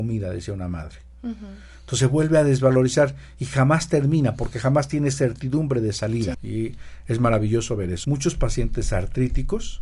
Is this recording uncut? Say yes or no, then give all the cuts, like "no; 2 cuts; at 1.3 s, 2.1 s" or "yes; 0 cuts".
no; 2 cuts; at 6.3 s, 8.0 s